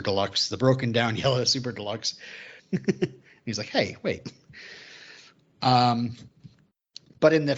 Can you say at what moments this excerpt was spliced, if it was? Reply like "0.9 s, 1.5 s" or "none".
2.6 s